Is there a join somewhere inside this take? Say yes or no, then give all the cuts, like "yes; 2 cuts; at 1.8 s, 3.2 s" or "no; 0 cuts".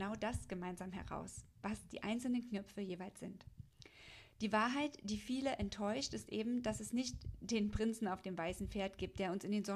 no; 0 cuts